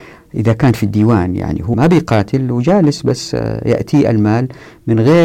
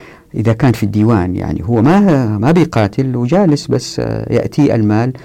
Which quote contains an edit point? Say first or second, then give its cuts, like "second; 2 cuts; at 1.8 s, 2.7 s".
first; 1 cut; at 1.7 s